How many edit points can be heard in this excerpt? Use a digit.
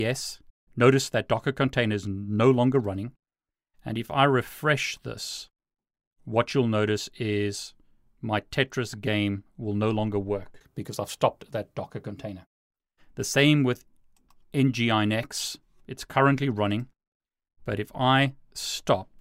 0